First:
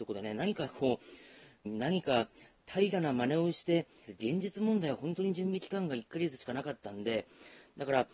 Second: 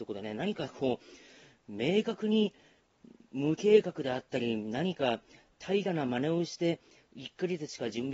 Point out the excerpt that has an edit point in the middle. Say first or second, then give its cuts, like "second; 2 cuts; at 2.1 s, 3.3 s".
first; 2 cuts; at 1.6 s, 4.1 s